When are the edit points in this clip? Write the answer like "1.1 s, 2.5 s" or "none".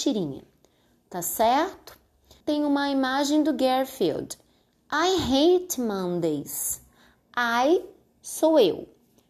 2.4 s